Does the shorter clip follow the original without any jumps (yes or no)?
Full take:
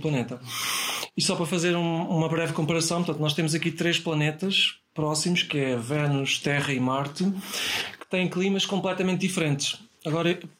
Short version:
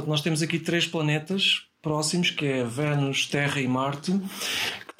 yes